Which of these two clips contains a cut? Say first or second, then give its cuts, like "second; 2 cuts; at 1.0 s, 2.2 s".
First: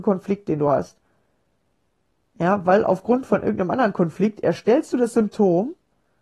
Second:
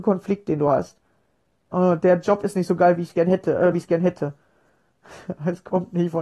second; 2 cuts; at 1.7 s, 3.7 s